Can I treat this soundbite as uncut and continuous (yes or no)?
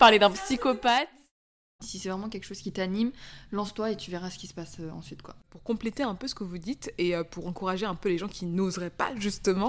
no